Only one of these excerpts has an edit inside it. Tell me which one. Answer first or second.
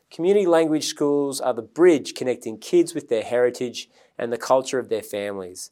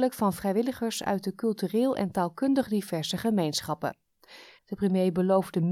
second